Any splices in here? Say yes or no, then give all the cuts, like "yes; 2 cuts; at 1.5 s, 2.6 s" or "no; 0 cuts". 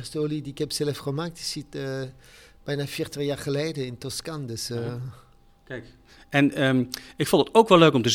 no; 0 cuts